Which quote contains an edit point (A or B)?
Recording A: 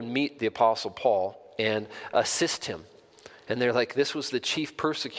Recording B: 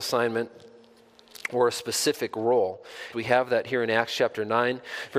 B